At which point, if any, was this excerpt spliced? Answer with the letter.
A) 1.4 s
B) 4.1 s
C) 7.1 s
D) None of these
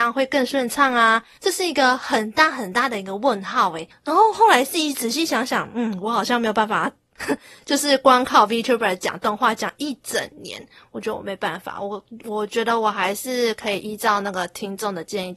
A